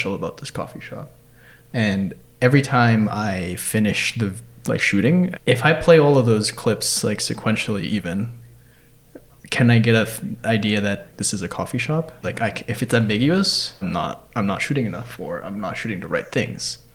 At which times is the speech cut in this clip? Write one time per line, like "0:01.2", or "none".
0:05.3
0:12.2
0:13.8